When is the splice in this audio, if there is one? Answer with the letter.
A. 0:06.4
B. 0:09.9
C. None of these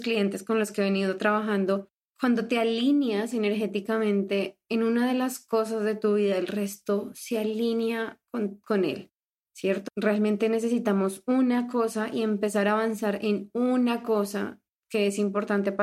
B